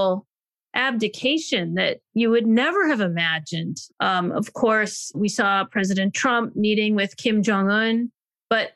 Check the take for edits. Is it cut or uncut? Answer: cut